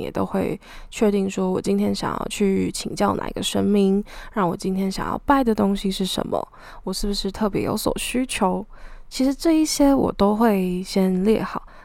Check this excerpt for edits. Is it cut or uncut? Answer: uncut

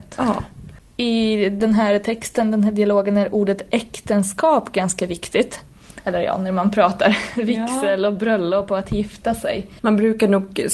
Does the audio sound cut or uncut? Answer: cut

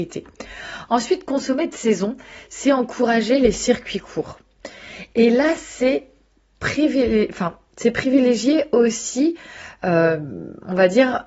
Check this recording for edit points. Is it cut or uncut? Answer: uncut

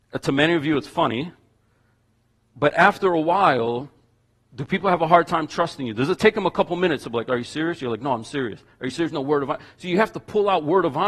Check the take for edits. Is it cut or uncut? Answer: uncut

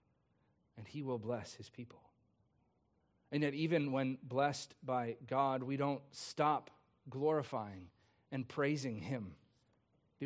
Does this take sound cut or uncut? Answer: uncut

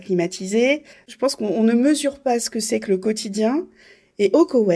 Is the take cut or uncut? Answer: cut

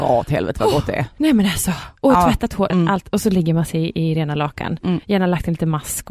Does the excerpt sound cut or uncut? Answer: cut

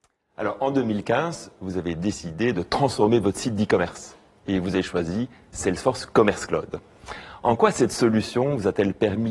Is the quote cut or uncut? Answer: uncut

